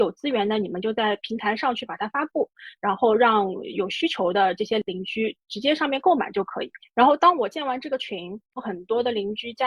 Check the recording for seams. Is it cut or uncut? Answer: cut